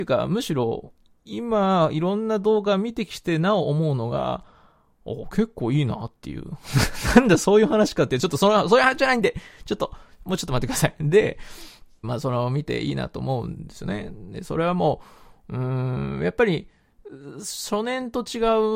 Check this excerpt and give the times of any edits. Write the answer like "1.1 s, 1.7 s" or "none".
12.0 s